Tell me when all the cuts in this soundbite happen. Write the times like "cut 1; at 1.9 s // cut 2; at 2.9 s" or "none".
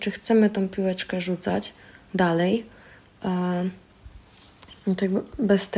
none